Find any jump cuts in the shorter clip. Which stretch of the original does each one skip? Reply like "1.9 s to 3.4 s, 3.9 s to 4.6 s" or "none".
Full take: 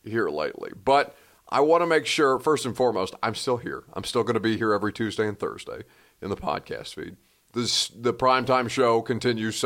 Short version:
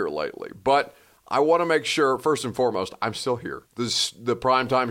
3.8 s to 7.4 s